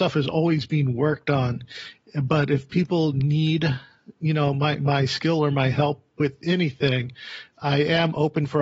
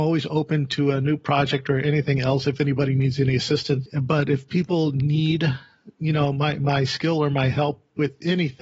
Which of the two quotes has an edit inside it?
second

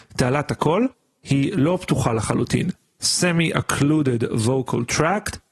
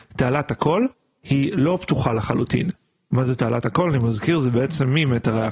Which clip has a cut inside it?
first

